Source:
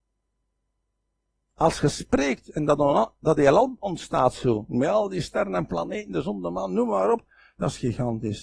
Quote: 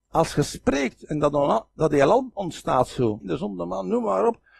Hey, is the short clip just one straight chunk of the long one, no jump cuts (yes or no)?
no